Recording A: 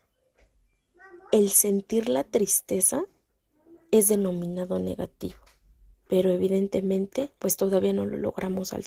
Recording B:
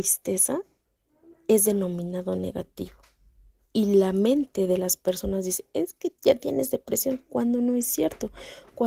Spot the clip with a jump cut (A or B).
A